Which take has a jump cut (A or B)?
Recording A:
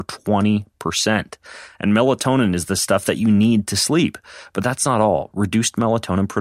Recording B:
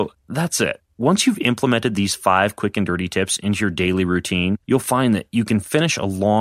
B